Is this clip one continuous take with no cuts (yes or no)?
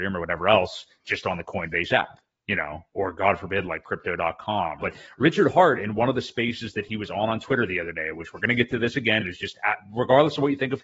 no